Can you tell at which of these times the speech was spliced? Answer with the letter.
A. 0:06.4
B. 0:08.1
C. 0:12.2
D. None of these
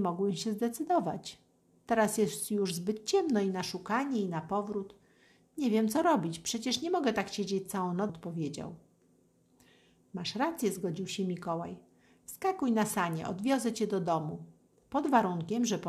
B